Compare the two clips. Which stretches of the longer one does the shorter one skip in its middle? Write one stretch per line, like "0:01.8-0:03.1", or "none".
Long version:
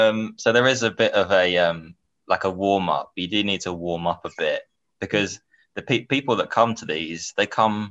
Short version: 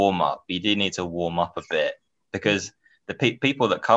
none